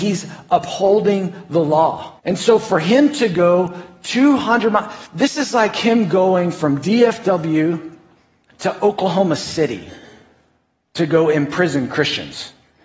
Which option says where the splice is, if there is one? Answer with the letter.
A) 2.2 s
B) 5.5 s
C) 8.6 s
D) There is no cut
A